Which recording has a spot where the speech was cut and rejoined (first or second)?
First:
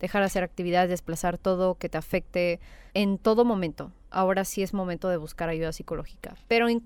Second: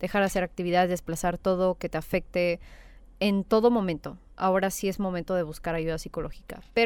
first